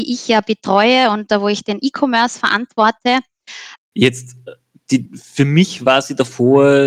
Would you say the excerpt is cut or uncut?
cut